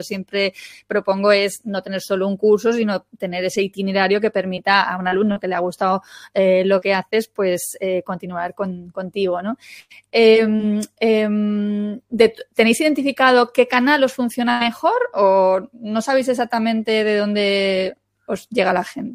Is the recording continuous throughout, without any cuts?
yes; 0 cuts

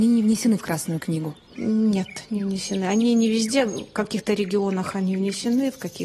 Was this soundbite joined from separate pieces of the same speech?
no; 0 cuts

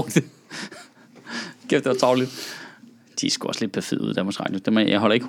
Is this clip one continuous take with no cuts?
yes; 0 cuts

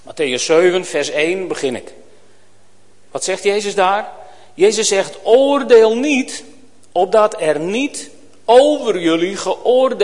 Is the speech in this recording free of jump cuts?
yes; 0 cuts

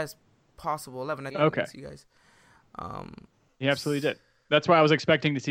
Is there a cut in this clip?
yes; 2 cuts; at 1.3 s, 3.5 s

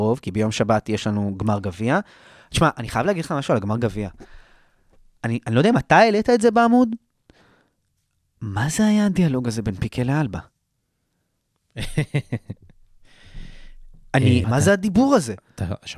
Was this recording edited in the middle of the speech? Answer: yes; 1 cut; at 14.4 s

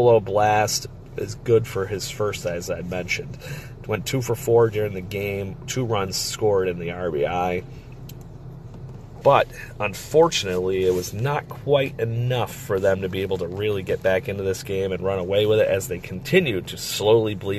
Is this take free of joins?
no; 1 cut; at 9.2 s

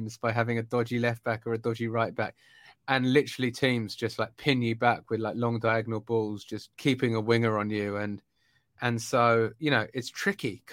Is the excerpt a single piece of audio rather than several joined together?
no; 1 cut; at 6.7 s

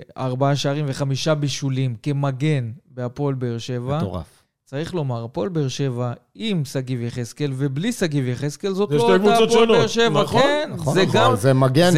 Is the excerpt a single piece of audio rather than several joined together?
yes; 0 cuts

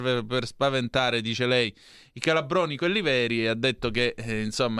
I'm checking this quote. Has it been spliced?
no; 0 cuts

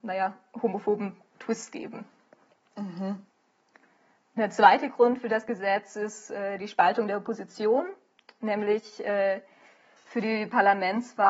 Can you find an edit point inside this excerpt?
no; 0 cuts

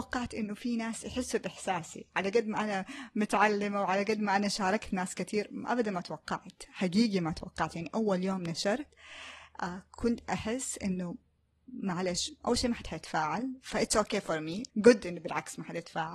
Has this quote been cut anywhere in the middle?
yes; 1 cut; at 14.7 s

